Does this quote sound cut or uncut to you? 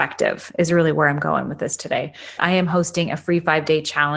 cut